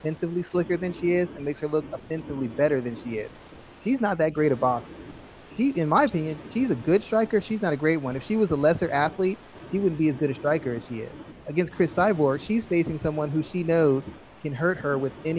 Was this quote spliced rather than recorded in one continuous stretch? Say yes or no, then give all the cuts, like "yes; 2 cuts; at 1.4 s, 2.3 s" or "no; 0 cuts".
no; 0 cuts